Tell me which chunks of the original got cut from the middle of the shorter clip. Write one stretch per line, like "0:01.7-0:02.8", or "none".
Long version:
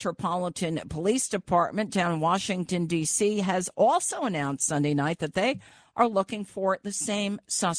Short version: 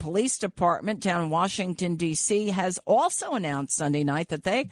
none